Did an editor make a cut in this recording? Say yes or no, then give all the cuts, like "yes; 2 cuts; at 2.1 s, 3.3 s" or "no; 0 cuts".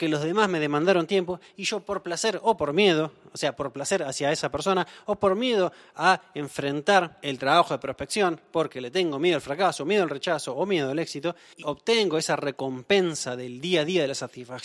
yes; 1 cut; at 11.6 s